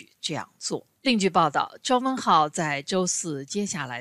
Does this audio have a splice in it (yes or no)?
yes